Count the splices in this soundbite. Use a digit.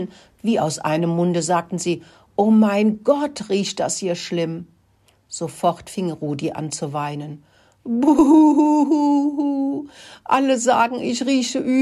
0